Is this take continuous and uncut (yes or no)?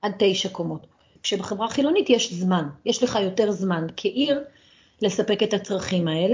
no